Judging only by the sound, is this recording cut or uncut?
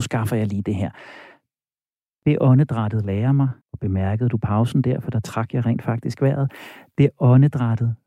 cut